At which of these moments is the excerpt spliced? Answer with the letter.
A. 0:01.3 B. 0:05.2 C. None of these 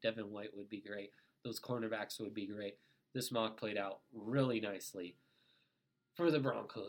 C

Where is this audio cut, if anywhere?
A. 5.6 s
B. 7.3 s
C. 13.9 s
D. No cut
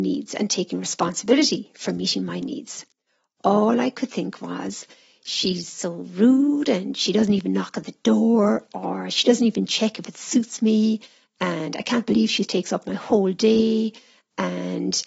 D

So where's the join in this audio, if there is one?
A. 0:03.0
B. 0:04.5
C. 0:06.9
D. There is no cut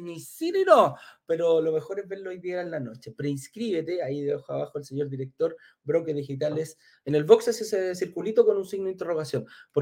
C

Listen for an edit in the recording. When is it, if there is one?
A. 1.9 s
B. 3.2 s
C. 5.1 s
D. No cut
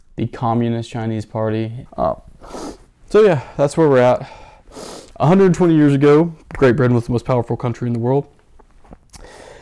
A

